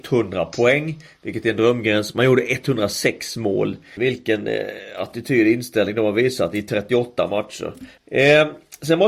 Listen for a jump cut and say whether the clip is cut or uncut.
cut